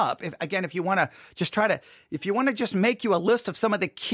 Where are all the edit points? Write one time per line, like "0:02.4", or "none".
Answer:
none